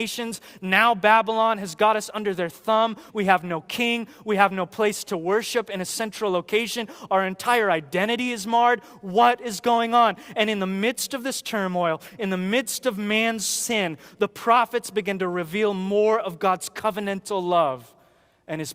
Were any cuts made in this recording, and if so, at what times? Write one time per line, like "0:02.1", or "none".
0:03.1